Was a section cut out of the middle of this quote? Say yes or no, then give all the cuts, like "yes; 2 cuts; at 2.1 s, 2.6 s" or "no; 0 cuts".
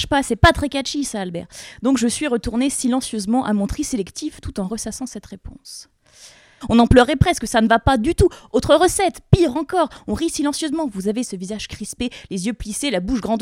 yes; 1 cut; at 6.6 s